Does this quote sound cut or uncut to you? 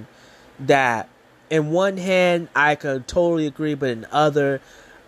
uncut